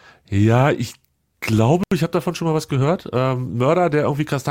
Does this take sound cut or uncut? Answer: uncut